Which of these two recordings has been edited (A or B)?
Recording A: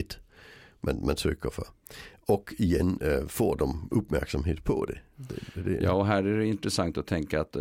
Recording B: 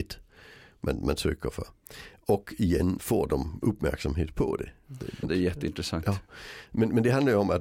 B